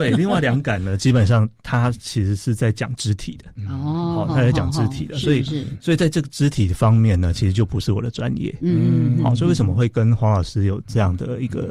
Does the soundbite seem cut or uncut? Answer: uncut